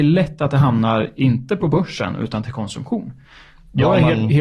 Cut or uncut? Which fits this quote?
uncut